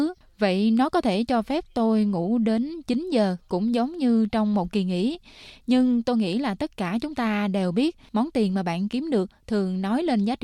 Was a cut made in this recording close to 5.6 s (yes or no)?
no